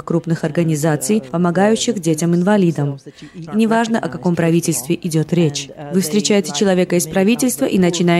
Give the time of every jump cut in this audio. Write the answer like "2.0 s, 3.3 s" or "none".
3.5 s